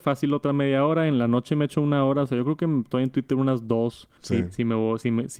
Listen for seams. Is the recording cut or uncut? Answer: cut